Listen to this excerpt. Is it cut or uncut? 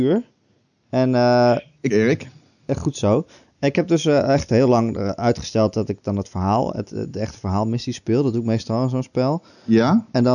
cut